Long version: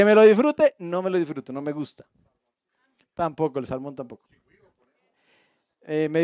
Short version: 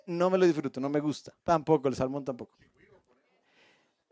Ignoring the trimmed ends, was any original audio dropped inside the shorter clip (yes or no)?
yes